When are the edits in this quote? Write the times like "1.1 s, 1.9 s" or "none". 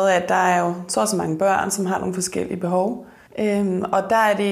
3.3 s